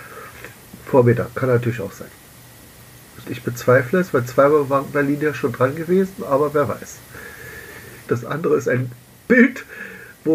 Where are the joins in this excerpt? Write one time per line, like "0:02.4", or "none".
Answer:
0:03.2
0:08.1